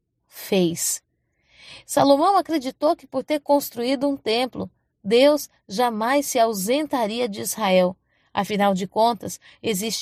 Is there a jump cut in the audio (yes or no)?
no